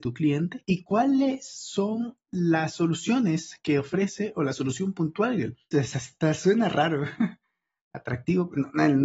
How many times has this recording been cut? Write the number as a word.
one